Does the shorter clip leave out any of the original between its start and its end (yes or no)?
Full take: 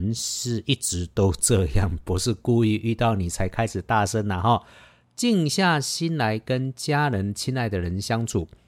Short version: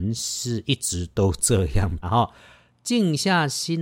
yes